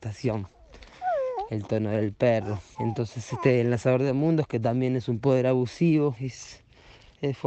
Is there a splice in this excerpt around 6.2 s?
yes; 2 cuts; at 2.7 s, 6.2 s

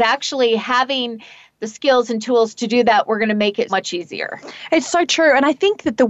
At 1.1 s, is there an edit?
no; 1 cut; at 3.7 s

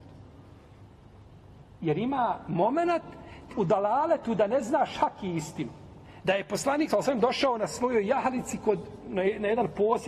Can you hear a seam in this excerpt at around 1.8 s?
no; 2 cuts; at 3.5 s, 6.2 s

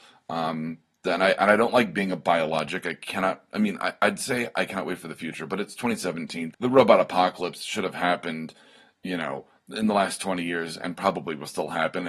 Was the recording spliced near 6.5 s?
yes; 1 cut; at 6.5 s

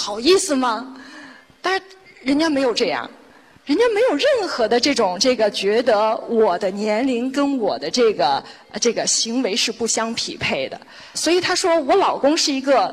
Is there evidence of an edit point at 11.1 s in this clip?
yes; 1 cut; at 11.1 s

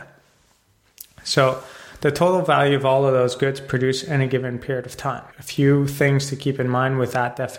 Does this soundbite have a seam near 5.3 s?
yes; 1 cut; at 5.3 s

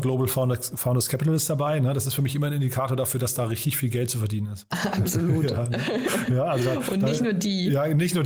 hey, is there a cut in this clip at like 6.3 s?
no; 0 cuts

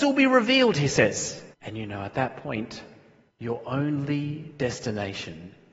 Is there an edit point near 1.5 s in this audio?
yes; 2 cuts; at 1.5 s, 3.3 s

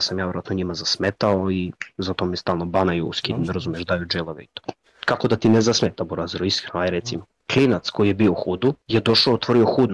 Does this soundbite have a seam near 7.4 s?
yes; 2 cuts; at 7.4 s, 8.8 s

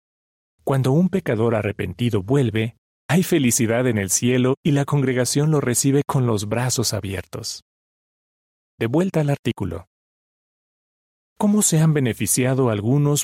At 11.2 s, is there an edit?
yes; 1 cut; at 11.2 s

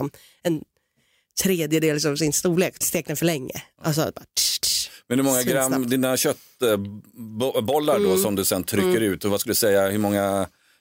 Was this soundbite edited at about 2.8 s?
yes; 1 cut; at 2.8 s

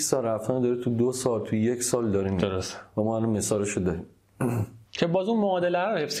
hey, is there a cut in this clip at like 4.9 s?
yes; 1 cut; at 4.9 s

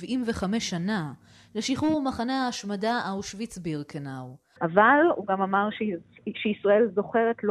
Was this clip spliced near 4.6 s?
yes; 1 cut; at 4.6 s

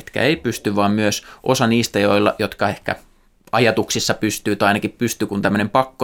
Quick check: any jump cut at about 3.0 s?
no; 0 cuts

